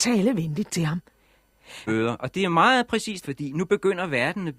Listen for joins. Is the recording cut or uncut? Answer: cut